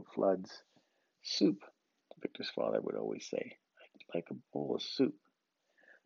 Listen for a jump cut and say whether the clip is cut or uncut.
uncut